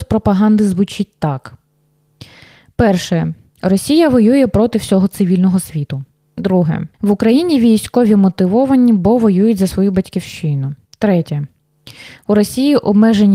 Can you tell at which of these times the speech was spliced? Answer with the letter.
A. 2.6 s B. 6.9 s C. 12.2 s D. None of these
B